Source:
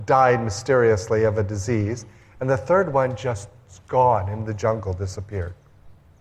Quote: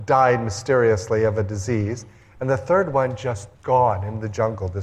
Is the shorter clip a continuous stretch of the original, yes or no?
no